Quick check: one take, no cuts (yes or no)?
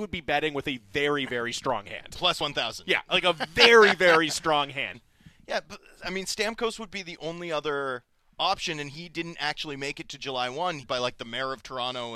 no